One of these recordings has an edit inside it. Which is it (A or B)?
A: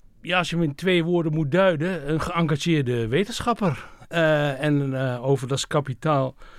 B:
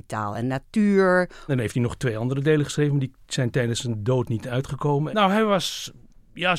B